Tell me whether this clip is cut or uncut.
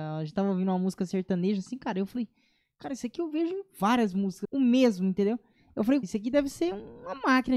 cut